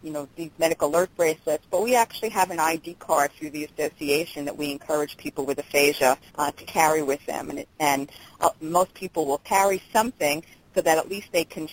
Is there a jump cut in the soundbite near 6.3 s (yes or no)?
yes